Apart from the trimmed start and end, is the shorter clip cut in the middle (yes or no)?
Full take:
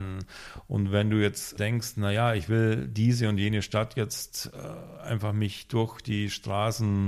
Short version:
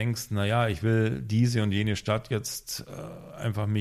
no